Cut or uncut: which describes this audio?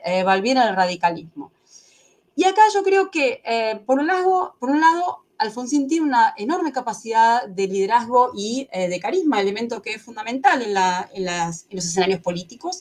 uncut